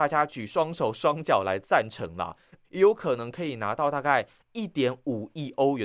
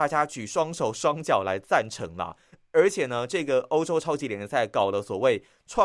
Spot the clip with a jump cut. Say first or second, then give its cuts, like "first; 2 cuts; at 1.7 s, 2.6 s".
first; 1 cut; at 2.6 s